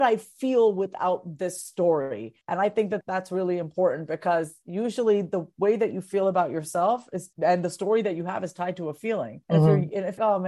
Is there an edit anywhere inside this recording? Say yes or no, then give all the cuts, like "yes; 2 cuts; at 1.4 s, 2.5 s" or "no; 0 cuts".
no; 0 cuts